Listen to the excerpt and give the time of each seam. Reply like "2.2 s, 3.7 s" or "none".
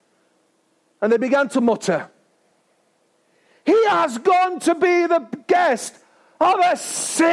none